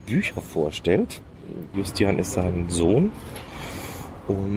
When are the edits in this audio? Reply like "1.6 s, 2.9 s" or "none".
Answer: 1.7 s